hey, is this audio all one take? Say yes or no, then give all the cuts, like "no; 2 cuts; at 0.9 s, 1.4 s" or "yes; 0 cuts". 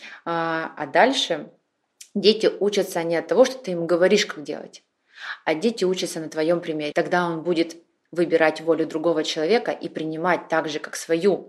no; 1 cut; at 6.9 s